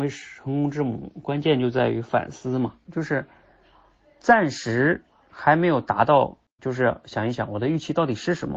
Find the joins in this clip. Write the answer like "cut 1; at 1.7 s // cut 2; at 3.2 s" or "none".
cut 1; at 2.9 s // cut 2; at 6.6 s